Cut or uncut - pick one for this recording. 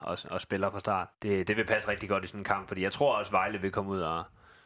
cut